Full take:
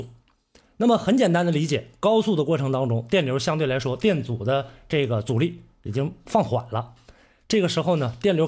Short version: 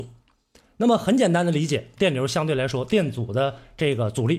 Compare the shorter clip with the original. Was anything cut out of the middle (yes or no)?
yes